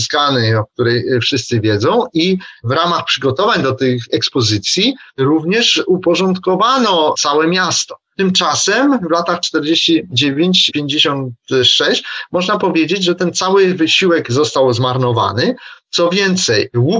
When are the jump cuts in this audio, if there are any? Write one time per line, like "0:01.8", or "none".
none